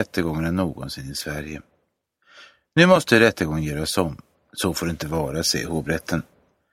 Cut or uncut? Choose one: cut